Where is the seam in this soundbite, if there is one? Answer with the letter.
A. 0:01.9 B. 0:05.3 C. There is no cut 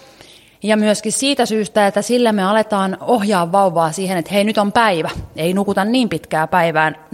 C